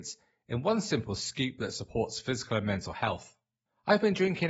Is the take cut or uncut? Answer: uncut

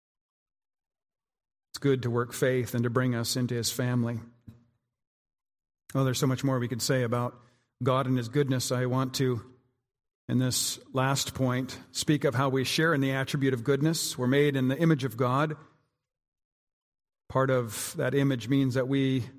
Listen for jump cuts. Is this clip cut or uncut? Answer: uncut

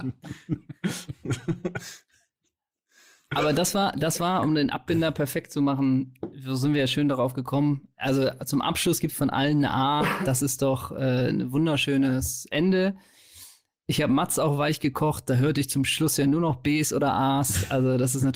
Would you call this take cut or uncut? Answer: uncut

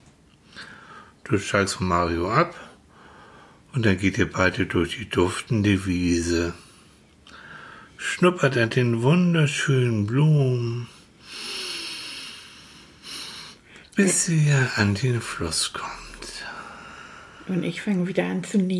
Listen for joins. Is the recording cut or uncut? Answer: uncut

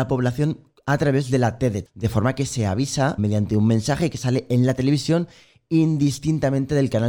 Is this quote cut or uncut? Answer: cut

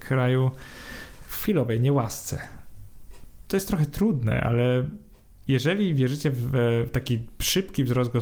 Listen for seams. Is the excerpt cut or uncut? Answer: uncut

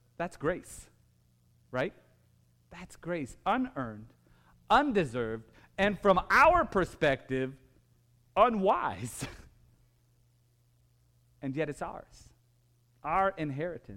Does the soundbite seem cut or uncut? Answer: uncut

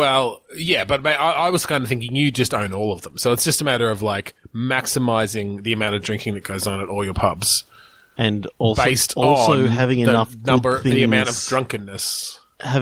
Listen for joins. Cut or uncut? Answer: uncut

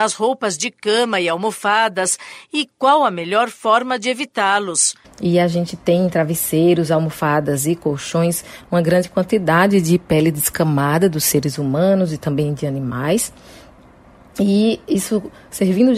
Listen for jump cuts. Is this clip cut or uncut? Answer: cut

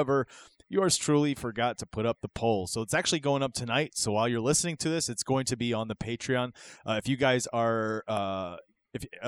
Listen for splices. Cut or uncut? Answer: uncut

